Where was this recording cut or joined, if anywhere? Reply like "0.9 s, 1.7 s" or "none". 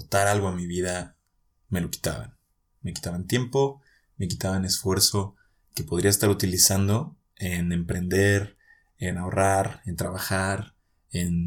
none